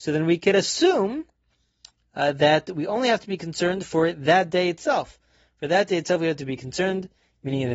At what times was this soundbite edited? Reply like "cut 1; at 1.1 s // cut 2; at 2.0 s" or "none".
none